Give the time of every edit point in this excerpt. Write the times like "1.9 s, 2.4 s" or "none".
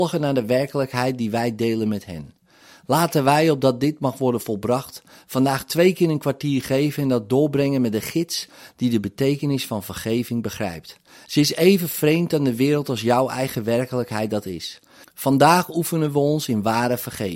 11.3 s, 15.0 s